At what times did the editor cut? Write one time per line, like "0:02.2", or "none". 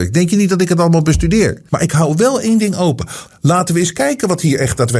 0:01.7
0:03.3